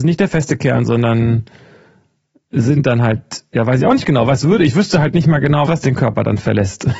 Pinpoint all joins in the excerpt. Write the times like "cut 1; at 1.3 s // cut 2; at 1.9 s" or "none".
cut 1; at 5.7 s